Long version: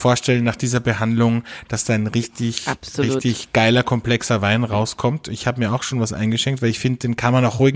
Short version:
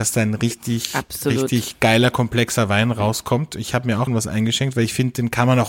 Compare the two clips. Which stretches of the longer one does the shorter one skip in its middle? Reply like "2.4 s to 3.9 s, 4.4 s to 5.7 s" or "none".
5.8 s to 5.9 s

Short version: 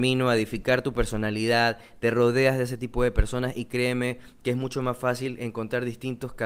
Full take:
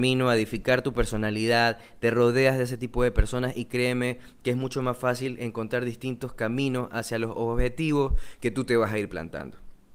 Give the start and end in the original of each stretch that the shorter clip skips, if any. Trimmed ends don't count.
none

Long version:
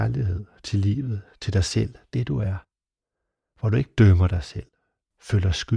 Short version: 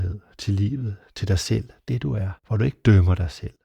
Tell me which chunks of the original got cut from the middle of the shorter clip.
2.6 s to 3.5 s

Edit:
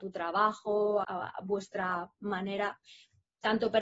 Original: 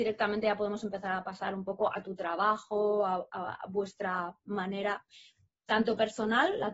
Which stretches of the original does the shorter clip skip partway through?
3.1 s to 3.3 s

